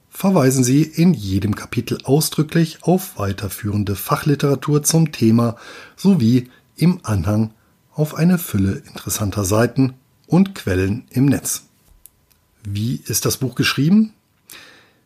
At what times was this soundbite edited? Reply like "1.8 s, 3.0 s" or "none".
none